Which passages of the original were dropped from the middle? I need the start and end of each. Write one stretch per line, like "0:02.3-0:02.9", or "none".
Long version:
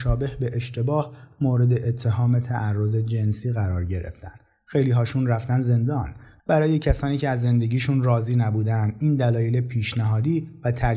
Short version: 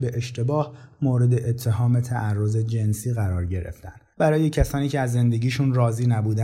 0:04.5-0:06.4